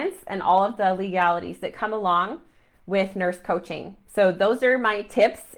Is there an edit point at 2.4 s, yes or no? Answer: no